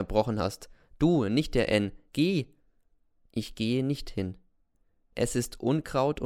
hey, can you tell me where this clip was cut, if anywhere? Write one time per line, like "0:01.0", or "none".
0:02.1
0:05.0